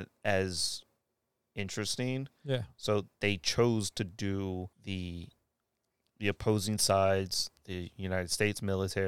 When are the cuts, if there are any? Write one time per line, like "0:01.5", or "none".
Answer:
0:04.7
0:07.6